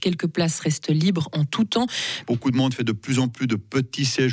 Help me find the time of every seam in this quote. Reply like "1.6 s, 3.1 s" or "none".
2.2 s